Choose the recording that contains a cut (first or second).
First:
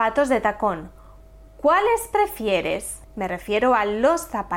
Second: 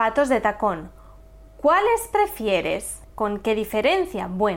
second